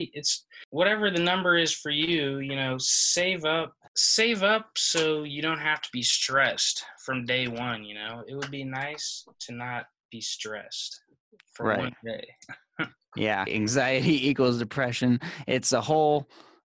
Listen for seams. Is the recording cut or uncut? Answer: cut